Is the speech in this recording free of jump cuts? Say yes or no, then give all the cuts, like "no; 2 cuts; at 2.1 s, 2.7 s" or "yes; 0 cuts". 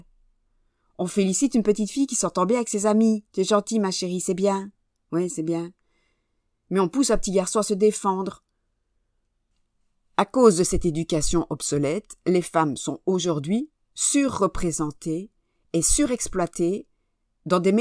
yes; 0 cuts